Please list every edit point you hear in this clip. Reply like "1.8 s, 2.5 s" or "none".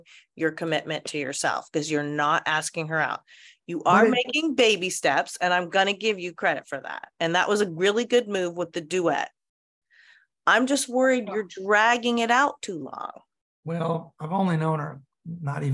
none